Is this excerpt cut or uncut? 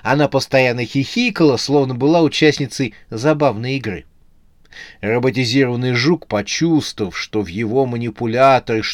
uncut